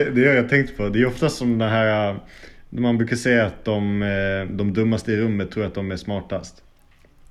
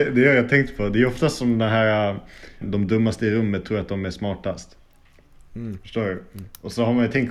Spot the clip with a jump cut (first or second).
second